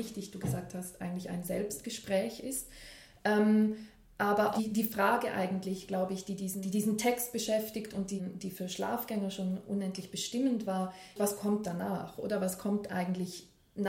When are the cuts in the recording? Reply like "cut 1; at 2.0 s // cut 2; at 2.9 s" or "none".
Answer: cut 1; at 11.2 s